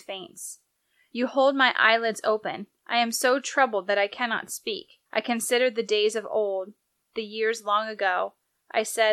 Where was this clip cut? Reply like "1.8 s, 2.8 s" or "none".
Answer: 5.1 s